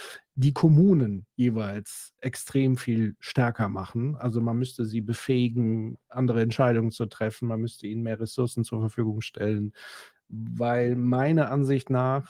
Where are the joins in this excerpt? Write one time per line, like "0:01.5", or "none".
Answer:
none